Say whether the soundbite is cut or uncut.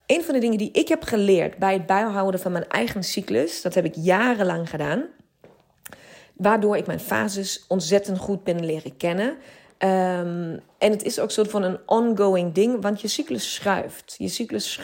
uncut